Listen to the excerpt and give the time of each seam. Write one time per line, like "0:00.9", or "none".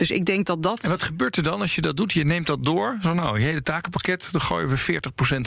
none